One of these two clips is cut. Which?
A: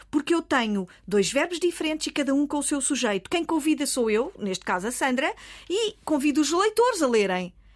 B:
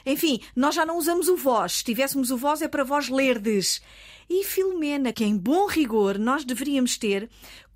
B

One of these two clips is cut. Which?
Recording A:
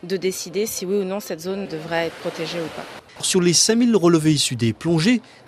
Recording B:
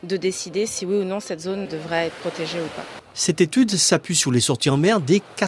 A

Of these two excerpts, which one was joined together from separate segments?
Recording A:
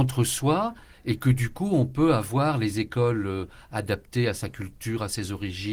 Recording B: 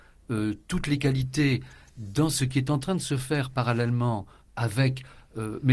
B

